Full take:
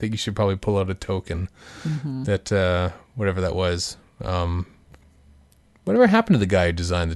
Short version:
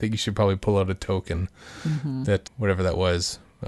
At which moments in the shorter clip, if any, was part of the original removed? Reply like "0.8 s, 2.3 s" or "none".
2.5 s